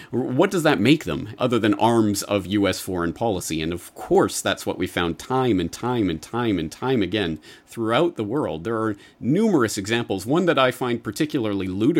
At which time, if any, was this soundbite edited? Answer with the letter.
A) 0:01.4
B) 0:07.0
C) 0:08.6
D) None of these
A